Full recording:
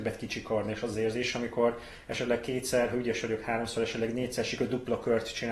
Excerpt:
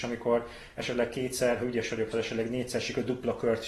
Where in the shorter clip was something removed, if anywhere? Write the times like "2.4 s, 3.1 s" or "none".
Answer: 2.1 s